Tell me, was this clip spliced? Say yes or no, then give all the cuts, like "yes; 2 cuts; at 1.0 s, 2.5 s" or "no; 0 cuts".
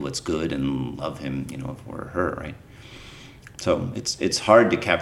yes; 1 cut; at 3.5 s